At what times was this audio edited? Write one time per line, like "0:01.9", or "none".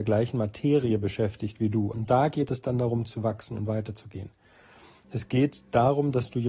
0:01.9
0:05.0